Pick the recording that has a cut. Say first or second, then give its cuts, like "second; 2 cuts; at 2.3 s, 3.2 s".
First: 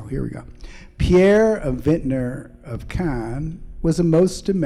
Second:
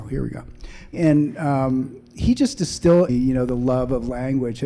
second; 2 cuts; at 0.9 s, 3.1 s